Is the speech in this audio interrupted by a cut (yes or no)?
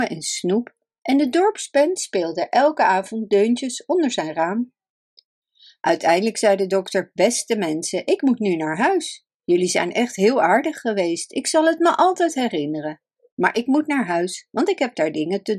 no